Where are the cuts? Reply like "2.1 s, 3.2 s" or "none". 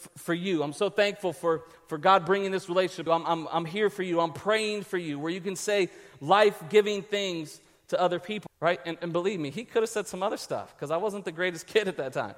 3.1 s, 8.5 s